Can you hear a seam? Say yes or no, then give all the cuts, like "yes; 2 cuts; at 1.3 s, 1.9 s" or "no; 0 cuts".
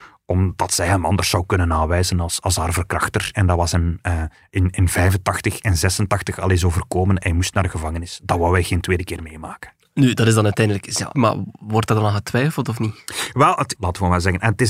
yes; 2 cuts; at 11.1 s, 13.7 s